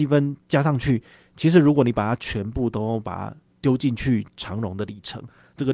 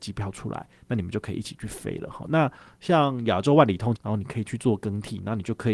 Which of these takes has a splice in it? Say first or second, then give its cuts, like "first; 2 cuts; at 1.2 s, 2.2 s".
second; 2 cuts; at 2.2 s, 3.9 s